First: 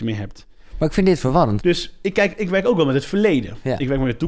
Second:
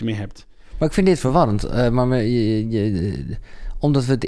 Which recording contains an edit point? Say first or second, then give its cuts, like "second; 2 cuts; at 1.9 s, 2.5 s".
first; 1 cut; at 1.6 s